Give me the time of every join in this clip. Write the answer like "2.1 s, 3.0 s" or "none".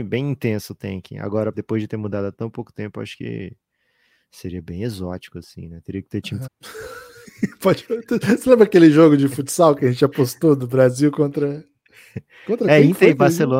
1.5 s, 6.5 s